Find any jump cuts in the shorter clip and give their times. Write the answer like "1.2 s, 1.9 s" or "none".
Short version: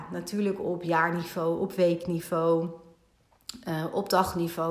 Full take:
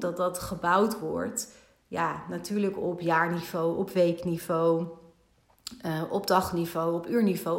none